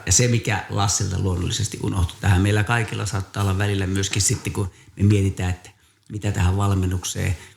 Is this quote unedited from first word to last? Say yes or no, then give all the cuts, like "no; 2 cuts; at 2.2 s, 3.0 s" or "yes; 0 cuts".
yes; 0 cuts